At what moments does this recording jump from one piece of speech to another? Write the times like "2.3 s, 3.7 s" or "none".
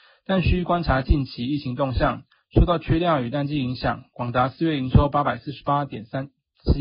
none